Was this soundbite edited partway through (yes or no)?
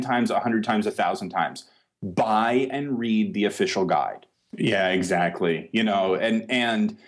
yes